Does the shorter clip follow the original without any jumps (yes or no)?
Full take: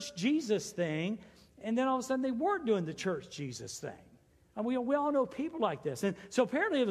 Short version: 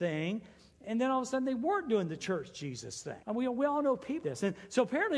no